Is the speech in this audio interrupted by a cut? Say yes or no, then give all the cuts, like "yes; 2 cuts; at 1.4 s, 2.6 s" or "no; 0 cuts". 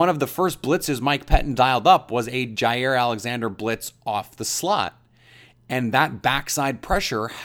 no; 0 cuts